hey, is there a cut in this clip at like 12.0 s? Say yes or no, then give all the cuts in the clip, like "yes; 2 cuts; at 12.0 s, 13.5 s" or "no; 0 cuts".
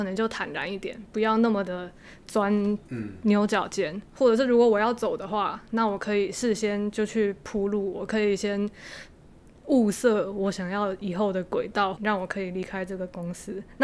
yes; 1 cut; at 12.0 s